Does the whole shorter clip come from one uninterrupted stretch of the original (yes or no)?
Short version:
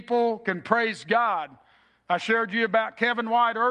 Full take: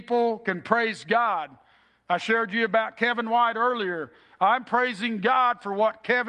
yes